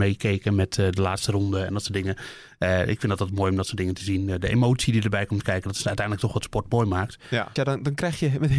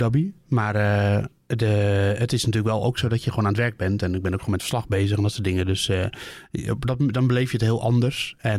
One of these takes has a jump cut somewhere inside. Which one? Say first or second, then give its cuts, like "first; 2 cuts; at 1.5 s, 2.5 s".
first; 1 cut; at 7.6 s